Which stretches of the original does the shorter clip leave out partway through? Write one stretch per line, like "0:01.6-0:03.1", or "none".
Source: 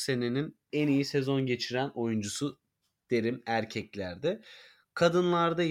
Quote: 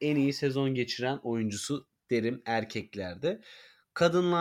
0:02.7-0:03.0